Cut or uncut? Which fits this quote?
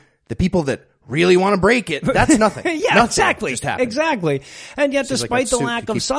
uncut